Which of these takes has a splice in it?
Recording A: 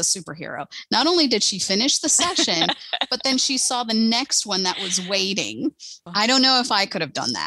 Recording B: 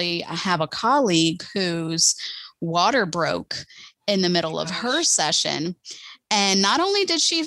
A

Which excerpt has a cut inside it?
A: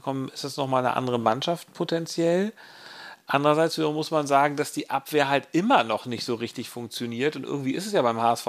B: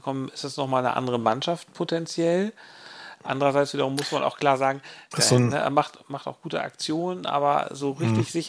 B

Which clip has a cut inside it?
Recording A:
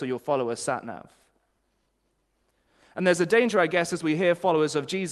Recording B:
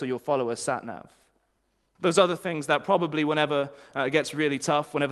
B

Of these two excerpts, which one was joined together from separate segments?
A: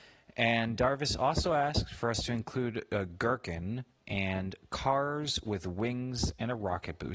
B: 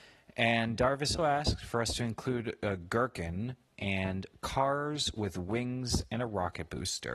B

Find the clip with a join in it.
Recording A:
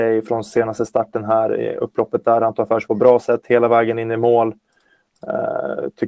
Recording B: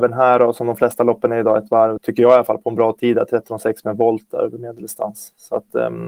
B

